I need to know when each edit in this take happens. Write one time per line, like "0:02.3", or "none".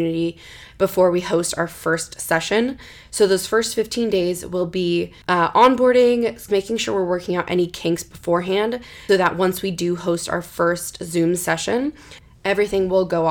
0:05.2
0:06.5
0:09.1